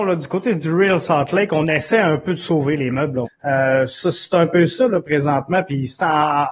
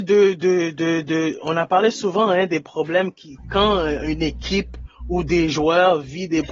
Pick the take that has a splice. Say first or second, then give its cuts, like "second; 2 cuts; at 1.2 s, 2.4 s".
first; 1 cut; at 3.2 s